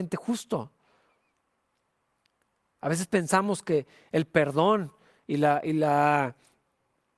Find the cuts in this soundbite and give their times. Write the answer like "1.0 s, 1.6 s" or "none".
none